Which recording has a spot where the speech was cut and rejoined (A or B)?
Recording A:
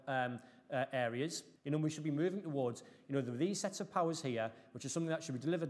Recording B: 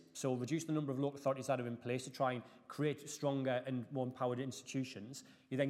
A